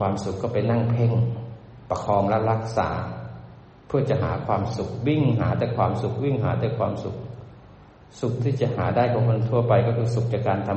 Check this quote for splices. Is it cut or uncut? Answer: uncut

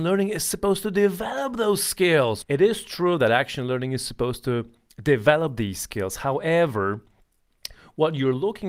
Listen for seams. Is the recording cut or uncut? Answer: cut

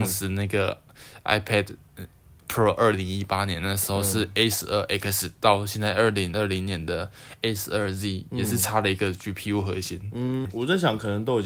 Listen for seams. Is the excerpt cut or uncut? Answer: cut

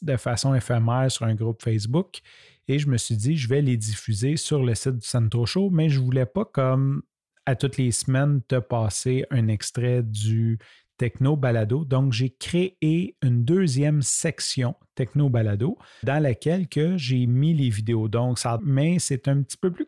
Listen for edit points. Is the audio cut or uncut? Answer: cut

